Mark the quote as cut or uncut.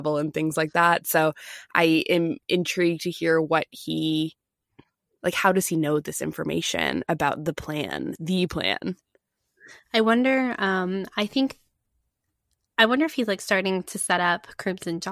uncut